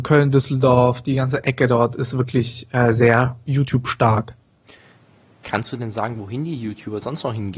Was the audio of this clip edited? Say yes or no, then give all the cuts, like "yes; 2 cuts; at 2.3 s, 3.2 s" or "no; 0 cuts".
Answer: no; 0 cuts